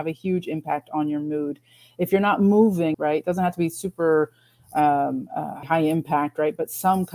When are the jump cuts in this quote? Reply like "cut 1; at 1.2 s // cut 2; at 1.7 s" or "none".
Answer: cut 1; at 2.9 s // cut 2; at 5.6 s

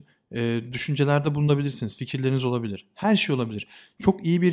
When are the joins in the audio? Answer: none

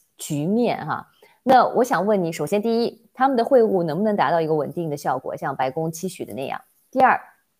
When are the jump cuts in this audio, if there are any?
none

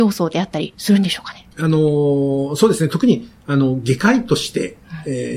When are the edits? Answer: cut 1; at 1.5 s

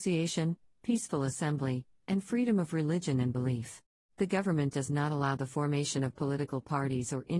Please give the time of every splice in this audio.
cut 1; at 4.1 s

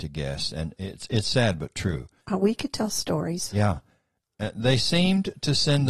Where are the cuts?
cut 1; at 2.2 s

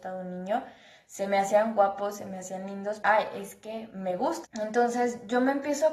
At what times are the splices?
cut 1; at 3.0 s // cut 2; at 4.4 s

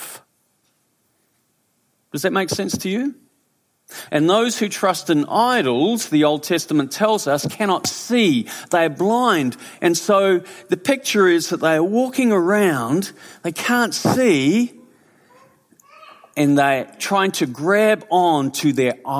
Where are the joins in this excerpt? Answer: cut 1; at 4.1 s

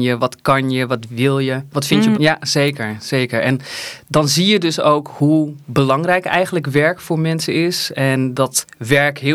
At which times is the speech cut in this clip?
cut 1; at 2.1 s

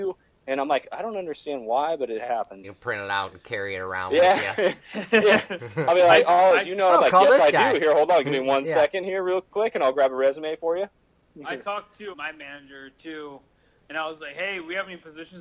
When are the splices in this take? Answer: cut 1; at 2.6 s // cut 2; at 12.1 s

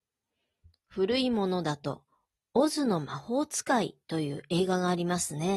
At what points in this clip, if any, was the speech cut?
none

